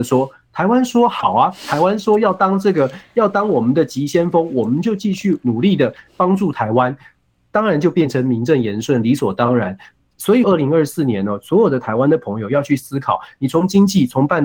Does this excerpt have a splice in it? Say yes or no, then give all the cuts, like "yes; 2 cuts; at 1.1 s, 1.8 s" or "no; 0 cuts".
yes; 1 cut; at 10.4 s